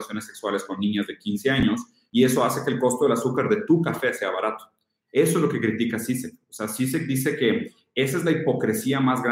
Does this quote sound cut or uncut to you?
uncut